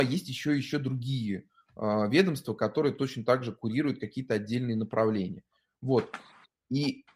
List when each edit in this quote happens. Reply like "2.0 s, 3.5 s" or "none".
none